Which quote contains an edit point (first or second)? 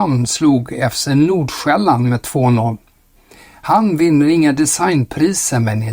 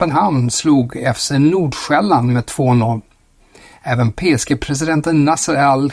second